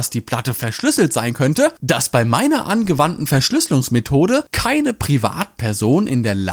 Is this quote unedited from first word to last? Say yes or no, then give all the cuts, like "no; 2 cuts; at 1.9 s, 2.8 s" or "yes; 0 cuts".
no; 1 cut; at 1.8 s